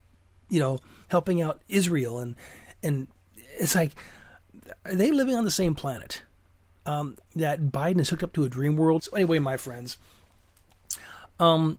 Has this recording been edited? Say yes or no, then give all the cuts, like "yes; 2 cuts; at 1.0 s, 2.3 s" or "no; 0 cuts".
yes; 2 cuts; at 7.2 s, 9.0 s